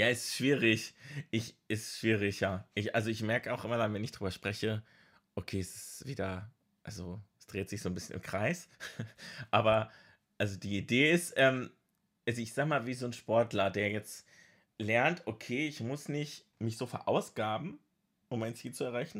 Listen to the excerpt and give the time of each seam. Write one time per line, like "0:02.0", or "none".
none